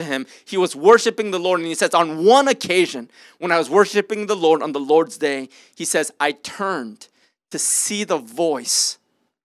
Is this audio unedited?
yes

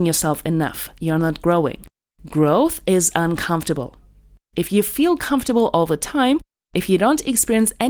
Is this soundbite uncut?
yes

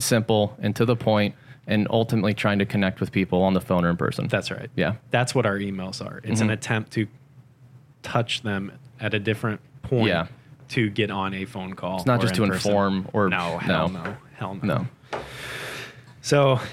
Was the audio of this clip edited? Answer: no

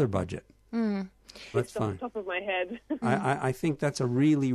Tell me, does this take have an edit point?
yes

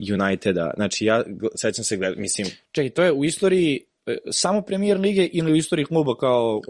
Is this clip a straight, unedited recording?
yes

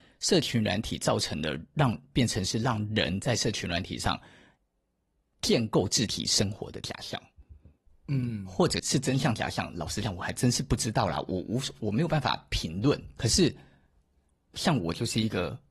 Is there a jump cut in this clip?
yes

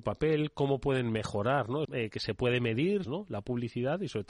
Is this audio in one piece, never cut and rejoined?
no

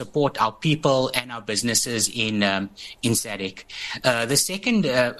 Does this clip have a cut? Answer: no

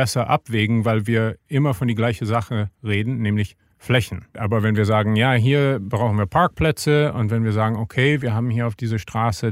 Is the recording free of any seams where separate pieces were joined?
yes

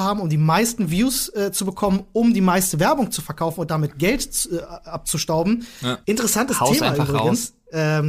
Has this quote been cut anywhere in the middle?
yes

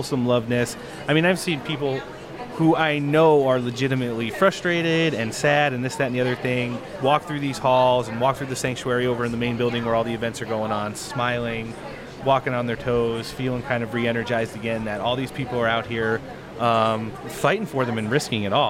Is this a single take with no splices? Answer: yes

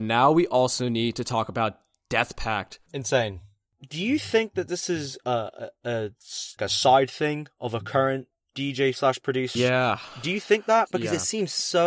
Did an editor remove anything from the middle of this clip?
yes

